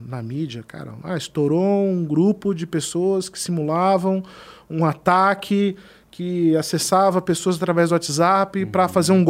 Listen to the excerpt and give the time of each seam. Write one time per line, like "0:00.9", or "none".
none